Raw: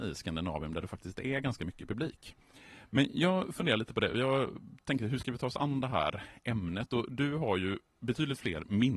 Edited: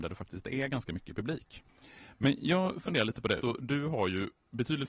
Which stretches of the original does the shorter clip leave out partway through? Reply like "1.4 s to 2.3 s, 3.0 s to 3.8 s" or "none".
4.1 s to 6.9 s